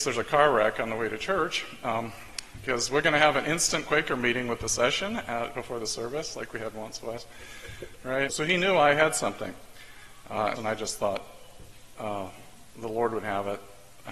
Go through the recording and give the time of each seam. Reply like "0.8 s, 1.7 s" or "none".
8.3 s, 10.6 s